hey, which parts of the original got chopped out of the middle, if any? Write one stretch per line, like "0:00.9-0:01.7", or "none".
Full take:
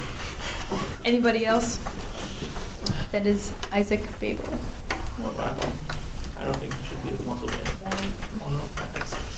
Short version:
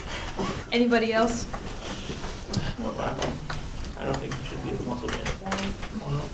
0:03.1-0:05.2

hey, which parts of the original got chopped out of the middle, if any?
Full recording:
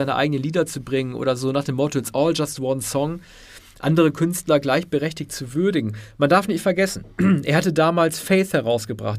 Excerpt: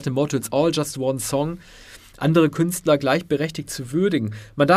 none

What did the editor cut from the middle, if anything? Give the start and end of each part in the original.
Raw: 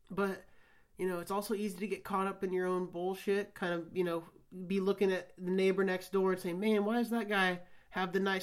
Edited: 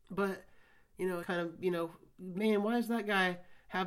0:01.2-0:03.5
0:04.7-0:06.6

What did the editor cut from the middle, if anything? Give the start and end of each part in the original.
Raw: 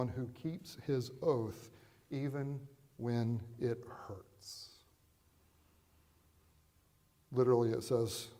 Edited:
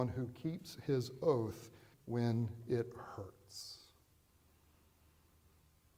0:01.9-0:02.9

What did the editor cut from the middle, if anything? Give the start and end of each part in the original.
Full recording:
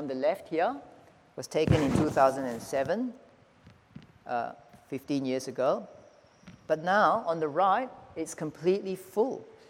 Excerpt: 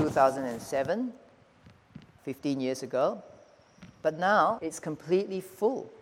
0:04.2-0:04.8
0:07.2-0:08.1

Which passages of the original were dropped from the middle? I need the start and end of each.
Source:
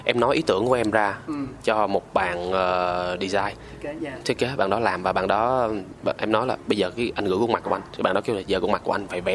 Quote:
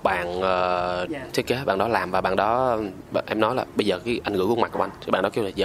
0:03.2-0:04.0

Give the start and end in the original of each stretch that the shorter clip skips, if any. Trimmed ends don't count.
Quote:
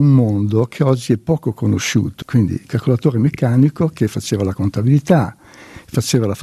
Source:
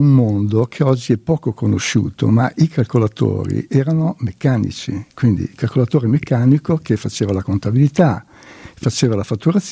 0:02.2-0:05.1

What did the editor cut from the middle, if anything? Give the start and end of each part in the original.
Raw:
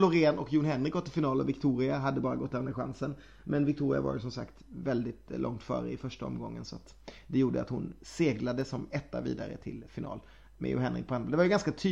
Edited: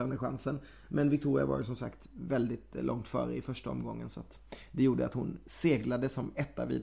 none

